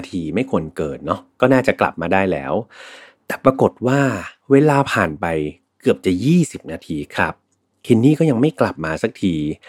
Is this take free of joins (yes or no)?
yes